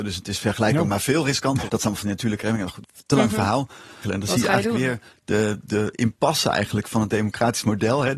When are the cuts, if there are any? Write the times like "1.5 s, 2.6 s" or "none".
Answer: 1.7 s, 4.0 s, 5.6 s

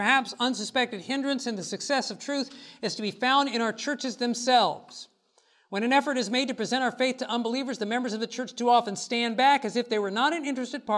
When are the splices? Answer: none

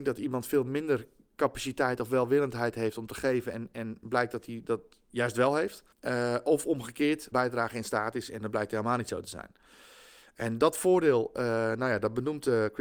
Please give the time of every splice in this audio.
5.9 s, 7.3 s

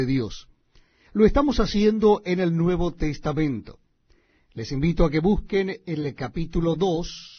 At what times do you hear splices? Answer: none

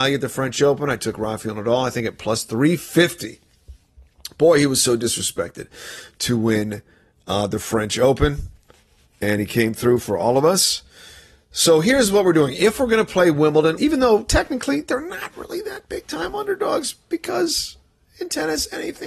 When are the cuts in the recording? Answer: 13.8 s

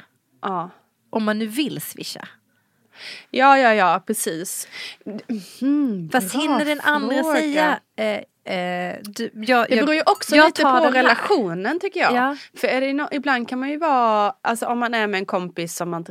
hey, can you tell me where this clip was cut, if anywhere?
none

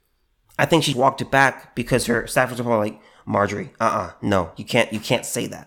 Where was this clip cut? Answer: 0.9 s

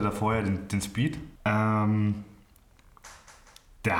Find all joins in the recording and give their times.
1.4 s

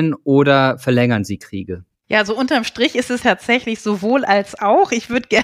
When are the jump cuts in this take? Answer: 3.2 s

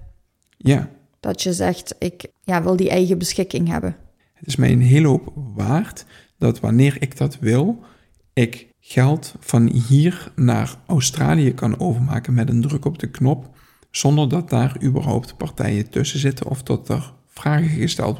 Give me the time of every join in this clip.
2.3 s, 4.2 s, 8.7 s

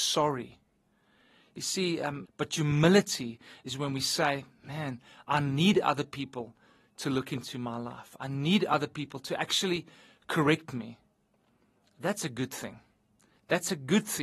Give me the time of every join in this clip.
2.2 s

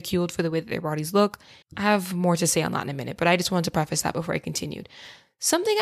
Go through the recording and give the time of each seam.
1.6 s

